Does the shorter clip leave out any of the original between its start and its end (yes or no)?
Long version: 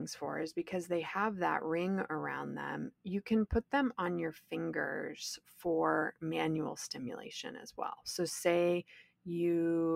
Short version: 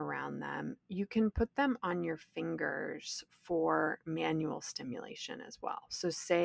no